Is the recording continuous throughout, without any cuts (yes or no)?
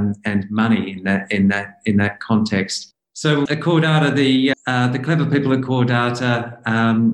no